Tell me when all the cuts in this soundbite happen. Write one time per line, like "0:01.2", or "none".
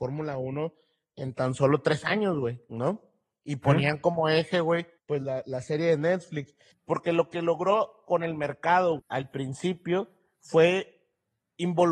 0:05.0
0:06.7
0:09.0